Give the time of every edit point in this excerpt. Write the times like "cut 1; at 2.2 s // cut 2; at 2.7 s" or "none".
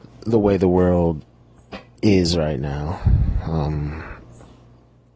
none